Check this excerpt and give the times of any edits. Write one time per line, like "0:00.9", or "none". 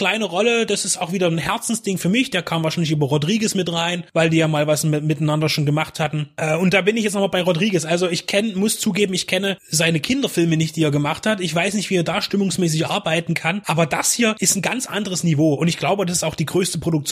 none